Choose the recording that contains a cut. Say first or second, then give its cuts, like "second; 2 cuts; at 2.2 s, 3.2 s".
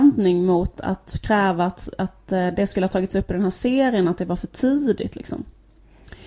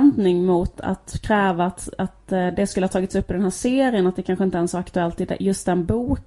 first; 1 cut; at 4.0 s